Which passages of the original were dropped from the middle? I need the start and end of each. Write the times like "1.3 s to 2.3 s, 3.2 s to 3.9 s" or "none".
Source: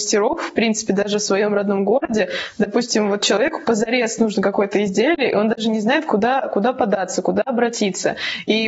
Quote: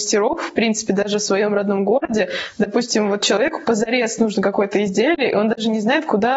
none